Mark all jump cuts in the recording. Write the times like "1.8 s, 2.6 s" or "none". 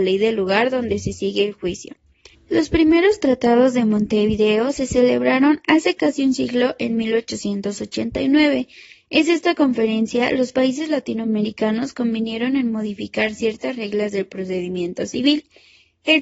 2.3 s